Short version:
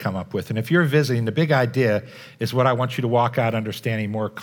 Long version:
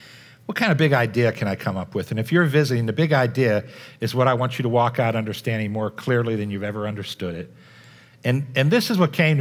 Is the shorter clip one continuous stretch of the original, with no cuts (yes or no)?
yes